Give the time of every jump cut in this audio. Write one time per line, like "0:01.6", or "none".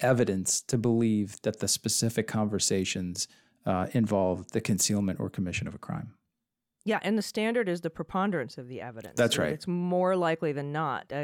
none